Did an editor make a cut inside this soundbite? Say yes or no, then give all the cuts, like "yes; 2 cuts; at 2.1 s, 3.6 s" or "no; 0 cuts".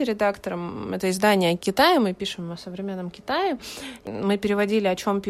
no; 0 cuts